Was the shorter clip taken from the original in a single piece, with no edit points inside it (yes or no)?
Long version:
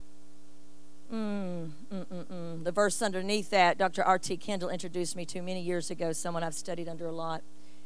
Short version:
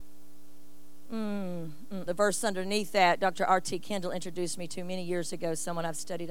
no